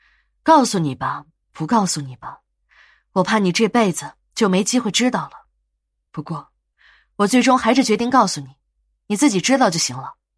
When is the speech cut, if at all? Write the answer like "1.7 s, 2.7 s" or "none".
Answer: 1.4 s, 6.1 s